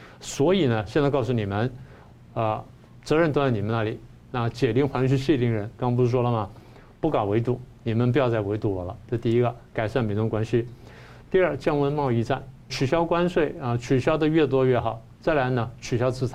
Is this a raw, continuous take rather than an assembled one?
no; 1 cut; at 12.7 s

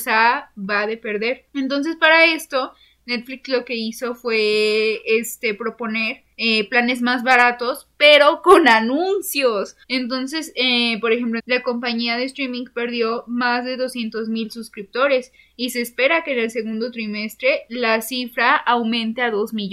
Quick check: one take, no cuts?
no; 2 cuts; at 9.8 s, 11.4 s

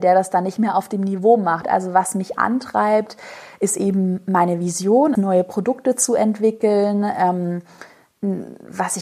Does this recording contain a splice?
yes; 2 cuts; at 1.6 s, 5.2 s

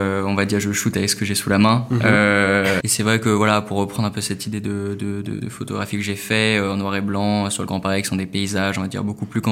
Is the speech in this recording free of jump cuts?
no; 2 cuts; at 2.8 s, 5.4 s

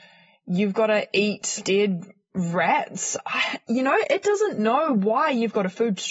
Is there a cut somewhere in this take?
yes; 1 cut; at 1.6 s

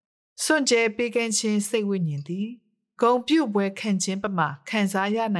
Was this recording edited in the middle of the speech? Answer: no; 0 cuts

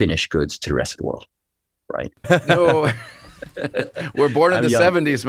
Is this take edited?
yes; 1 cut; at 2.2 s

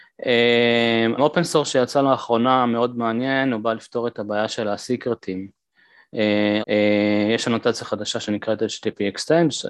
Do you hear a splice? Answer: yes; 2 cuts; at 1.2 s, 6.6 s

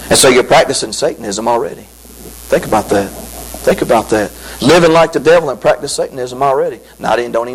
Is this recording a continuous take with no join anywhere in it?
yes; 0 cuts

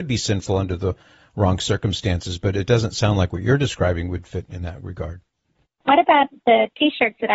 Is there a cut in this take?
yes; 1 cut; at 5.6 s

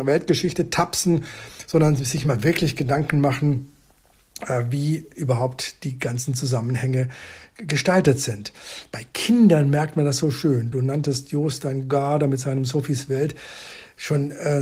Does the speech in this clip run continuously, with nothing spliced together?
yes; 0 cuts

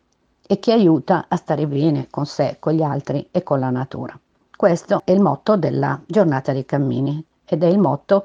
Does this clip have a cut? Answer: yes; 1 cut; at 4.4 s

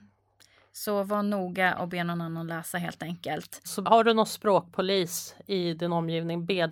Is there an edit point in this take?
yes; 1 cut; at 3.6 s

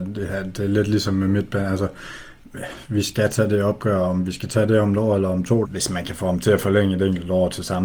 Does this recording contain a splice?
yes; 1 cut; at 5.6 s

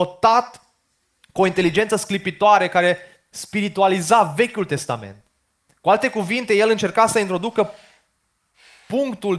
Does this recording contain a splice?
no; 0 cuts

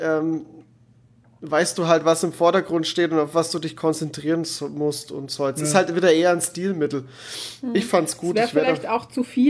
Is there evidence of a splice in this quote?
no; 0 cuts

